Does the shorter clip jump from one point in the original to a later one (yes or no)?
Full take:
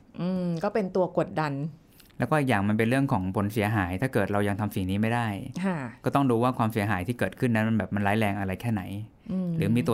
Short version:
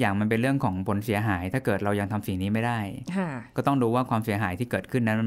no